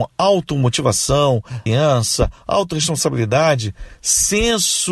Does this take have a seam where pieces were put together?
yes; 1 cut; at 1.7 s

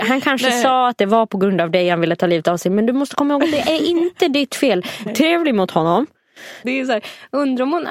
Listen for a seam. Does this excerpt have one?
yes; 2 cuts; at 5.1 s, 6.6 s

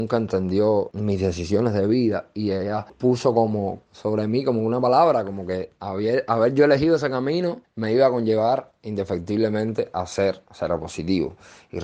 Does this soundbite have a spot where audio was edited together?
no; 0 cuts

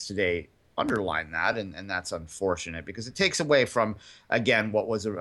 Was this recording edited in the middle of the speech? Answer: no; 0 cuts

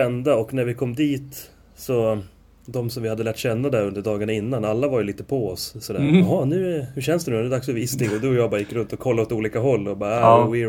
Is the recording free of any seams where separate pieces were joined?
yes; 0 cuts

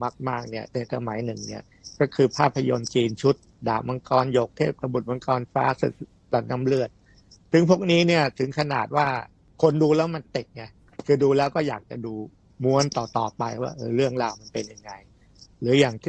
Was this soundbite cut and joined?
no; 0 cuts

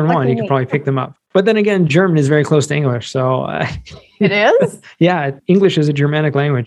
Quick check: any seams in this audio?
no; 0 cuts

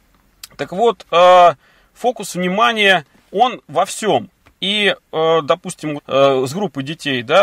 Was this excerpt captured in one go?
no; 1 cut; at 6.0 s

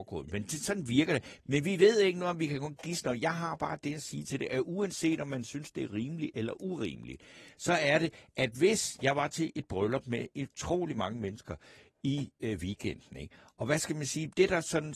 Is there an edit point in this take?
no; 0 cuts

